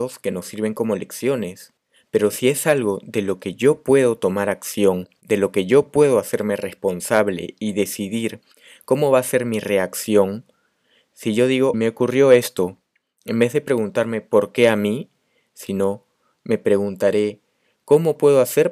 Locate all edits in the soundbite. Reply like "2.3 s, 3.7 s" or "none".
11.7 s